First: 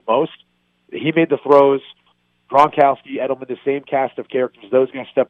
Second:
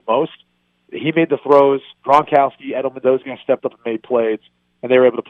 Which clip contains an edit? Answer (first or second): second